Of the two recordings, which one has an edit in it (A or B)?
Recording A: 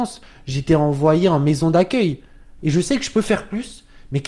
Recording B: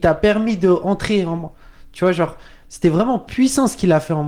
A